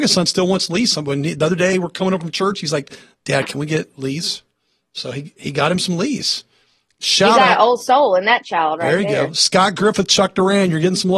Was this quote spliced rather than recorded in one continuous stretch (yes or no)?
no